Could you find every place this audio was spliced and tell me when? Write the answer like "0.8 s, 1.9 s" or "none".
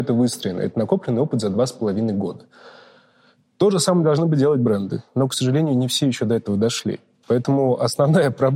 none